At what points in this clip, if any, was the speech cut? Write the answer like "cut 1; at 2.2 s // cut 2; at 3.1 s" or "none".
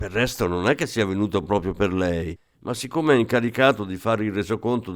none